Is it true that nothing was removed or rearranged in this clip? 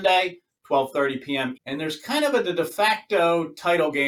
no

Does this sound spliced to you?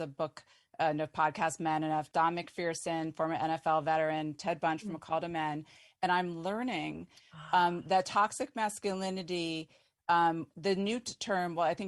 no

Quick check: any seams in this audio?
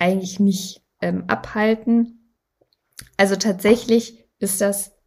yes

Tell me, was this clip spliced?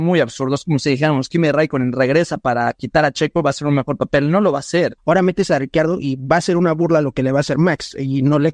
yes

